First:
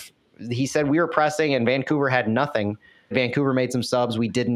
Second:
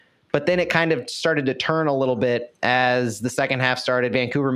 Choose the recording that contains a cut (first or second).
first